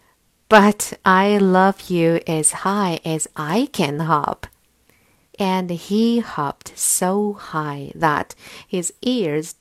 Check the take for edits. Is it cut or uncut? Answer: cut